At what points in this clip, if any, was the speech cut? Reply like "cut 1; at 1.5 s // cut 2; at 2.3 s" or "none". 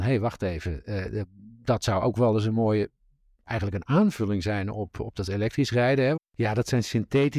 cut 1; at 6.2 s